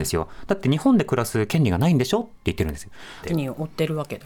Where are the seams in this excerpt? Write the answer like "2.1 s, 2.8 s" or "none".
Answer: 3.2 s